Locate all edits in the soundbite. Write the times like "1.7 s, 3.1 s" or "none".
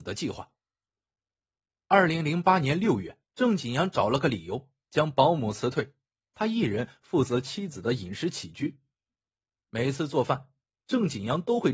3.3 s